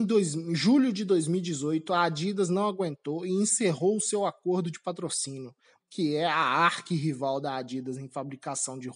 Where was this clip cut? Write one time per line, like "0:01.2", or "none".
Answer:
0:05.8